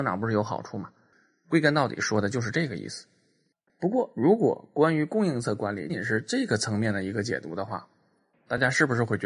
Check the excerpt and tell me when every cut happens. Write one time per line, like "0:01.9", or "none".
0:05.9